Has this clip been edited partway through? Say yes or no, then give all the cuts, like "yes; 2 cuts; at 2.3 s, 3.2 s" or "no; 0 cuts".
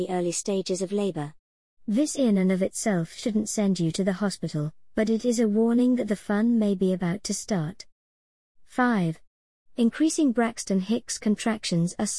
no; 0 cuts